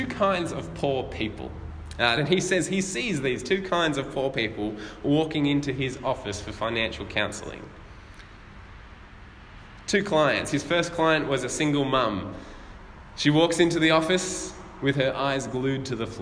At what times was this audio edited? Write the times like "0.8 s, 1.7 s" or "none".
2.2 s